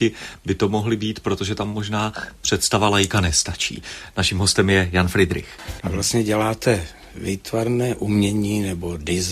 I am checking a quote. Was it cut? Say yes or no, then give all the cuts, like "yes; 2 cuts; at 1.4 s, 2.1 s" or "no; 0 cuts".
yes; 1 cut; at 5.8 s